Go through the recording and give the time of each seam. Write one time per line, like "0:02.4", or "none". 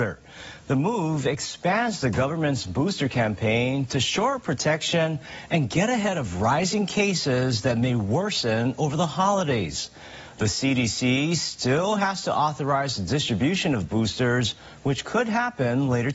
none